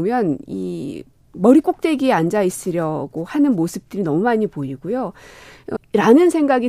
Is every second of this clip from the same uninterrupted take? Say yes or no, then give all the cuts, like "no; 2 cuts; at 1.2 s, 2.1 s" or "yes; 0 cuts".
no; 1 cut; at 5.8 s